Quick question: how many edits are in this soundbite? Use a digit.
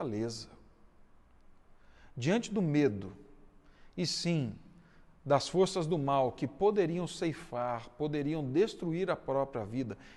0